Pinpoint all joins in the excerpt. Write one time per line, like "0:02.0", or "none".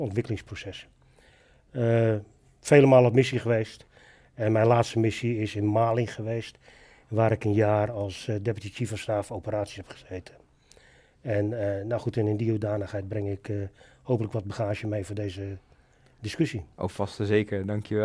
none